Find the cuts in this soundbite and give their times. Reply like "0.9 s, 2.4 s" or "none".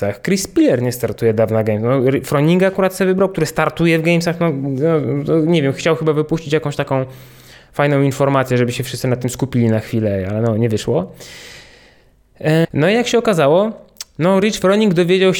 12.6 s